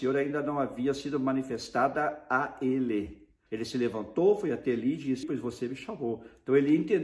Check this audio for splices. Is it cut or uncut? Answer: cut